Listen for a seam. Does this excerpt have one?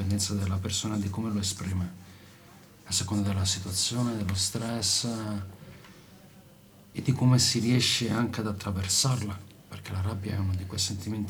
no; 0 cuts

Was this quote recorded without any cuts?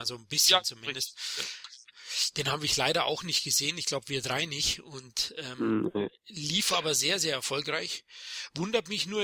yes; 0 cuts

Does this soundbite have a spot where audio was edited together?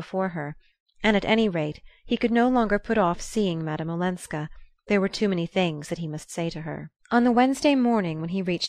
yes; 1 cut; at 7.0 s

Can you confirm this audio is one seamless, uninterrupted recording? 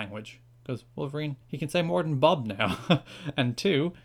no; 1 cut; at 1.4 s

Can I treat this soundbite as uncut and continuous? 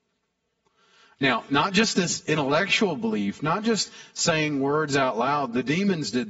yes; 0 cuts

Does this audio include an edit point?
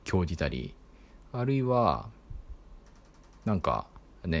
no; 0 cuts

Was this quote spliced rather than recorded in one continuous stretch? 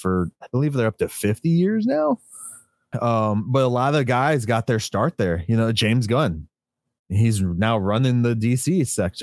yes; 1 cut; at 2.9 s

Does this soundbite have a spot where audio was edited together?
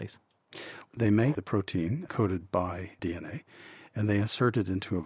no; 0 cuts

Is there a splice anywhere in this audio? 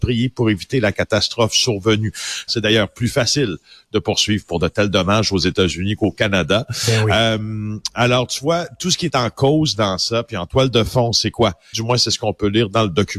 yes; 2 cuts; at 2.5 s, 11.7 s

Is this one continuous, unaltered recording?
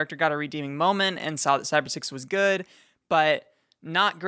yes; 0 cuts

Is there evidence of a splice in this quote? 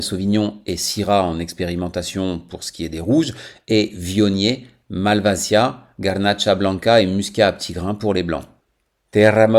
no; 0 cuts

